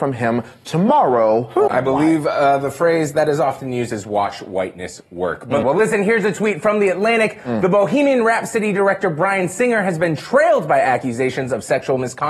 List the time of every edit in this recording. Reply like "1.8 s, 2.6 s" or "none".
1.7 s, 5.6 s